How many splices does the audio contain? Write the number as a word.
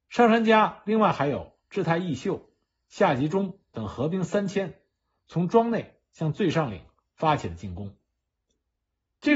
zero